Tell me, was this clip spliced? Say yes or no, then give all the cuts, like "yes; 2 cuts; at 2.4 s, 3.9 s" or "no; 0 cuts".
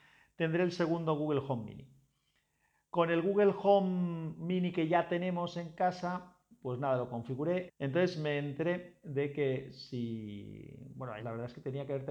yes; 2 cuts; at 7.7 s, 11.2 s